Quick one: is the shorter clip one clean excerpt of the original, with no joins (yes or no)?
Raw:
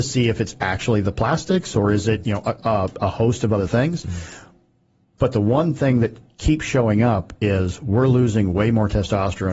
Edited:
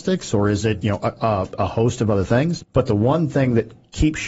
no